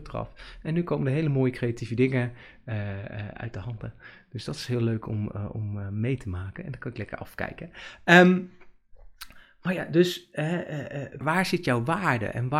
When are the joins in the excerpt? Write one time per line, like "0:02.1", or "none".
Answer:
0:11.2